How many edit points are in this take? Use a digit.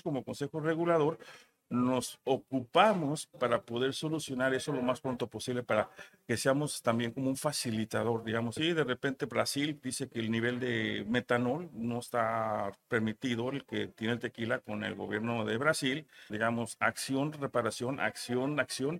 2